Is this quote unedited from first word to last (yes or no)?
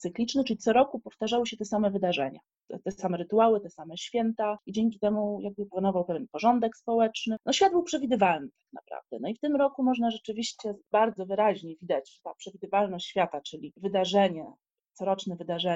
yes